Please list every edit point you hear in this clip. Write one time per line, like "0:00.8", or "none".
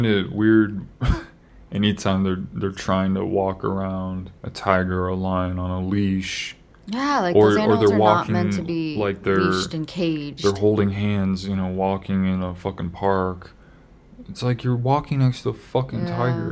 0:04.4